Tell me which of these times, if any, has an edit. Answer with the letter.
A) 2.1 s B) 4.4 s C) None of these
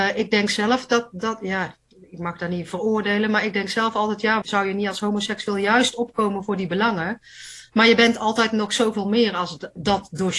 B